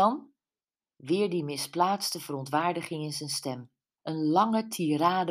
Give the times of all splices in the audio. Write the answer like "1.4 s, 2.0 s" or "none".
4.0 s